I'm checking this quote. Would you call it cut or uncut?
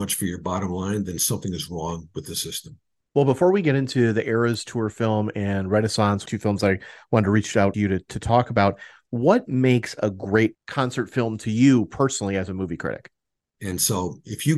cut